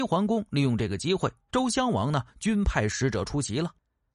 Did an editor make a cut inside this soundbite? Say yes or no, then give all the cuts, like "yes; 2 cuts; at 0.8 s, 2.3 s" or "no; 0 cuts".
yes; 1 cut; at 1.5 s